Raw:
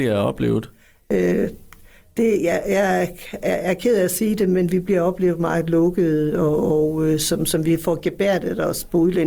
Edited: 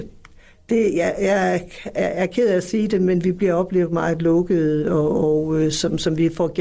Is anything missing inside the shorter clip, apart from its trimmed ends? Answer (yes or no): no